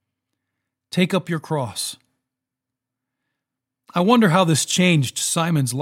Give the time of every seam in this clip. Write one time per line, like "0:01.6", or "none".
none